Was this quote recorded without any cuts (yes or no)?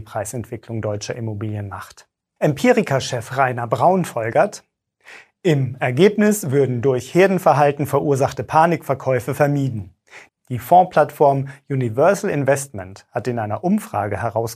no